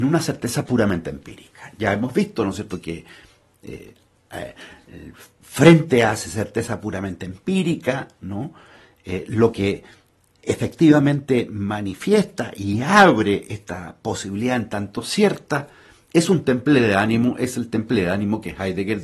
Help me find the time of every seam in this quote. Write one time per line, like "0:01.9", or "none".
none